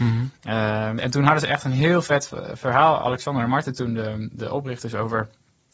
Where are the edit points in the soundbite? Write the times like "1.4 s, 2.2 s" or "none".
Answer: 1.0 s